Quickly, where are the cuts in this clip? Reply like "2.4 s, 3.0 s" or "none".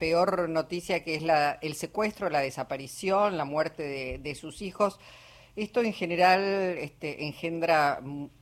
none